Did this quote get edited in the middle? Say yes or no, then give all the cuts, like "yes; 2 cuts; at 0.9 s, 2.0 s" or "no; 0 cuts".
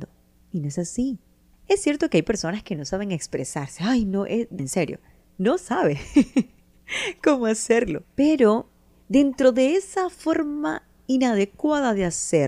yes; 1 cut; at 4.6 s